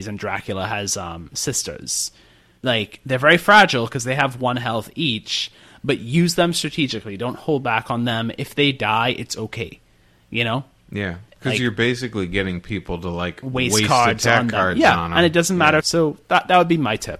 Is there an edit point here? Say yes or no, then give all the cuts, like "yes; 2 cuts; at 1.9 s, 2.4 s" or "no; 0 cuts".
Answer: yes; 1 cut; at 15.8 s